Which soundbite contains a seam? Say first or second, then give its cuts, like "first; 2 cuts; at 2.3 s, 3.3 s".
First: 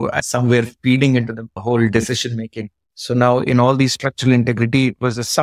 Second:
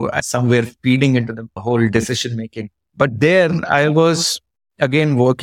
first; 1 cut; at 2.8 s